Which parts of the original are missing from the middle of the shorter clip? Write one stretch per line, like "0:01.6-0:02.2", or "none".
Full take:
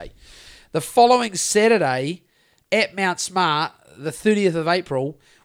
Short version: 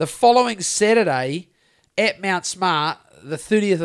none